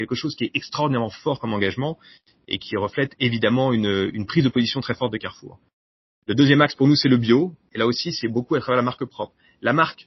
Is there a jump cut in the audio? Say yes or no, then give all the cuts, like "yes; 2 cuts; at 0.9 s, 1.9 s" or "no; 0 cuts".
no; 0 cuts